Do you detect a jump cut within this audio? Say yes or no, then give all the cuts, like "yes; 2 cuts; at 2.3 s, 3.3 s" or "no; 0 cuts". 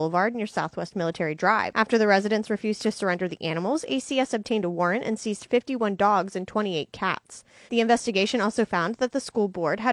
yes; 1 cut; at 7.7 s